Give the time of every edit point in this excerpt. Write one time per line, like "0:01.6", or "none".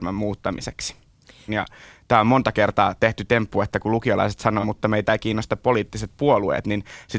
0:01.5
0:04.6

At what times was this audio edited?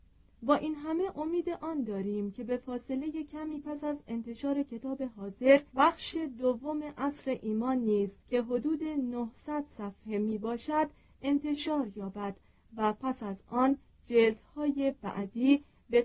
0:05.7
0:08.2

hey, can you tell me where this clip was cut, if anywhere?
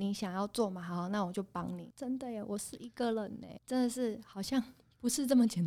0:01.9
0:03.6

